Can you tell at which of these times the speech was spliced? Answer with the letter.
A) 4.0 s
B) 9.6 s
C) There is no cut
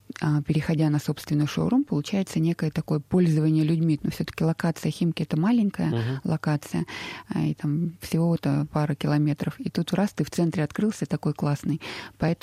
A